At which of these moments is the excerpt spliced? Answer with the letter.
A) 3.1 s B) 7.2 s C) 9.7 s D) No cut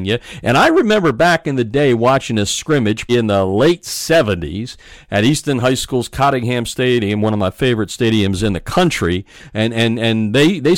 A